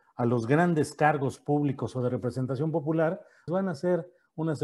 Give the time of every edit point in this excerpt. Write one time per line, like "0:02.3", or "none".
0:03.5